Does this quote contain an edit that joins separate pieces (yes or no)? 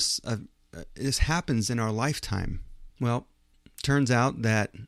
yes